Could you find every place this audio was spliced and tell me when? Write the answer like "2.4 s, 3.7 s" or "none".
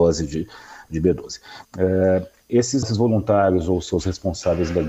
1.6 s, 2.8 s